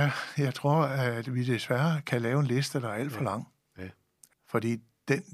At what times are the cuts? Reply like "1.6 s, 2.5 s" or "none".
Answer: 4.3 s

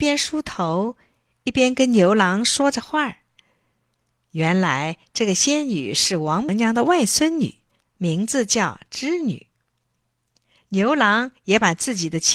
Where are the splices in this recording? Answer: 6.5 s, 7.8 s

